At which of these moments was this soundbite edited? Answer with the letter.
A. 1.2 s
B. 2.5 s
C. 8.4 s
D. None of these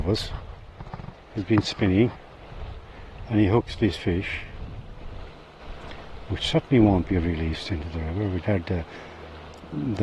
C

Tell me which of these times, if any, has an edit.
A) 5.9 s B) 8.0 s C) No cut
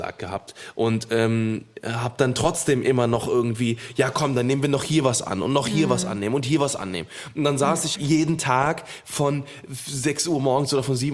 B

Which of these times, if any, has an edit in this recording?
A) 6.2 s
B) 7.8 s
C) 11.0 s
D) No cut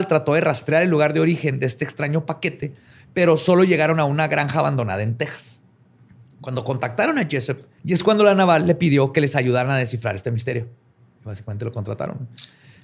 B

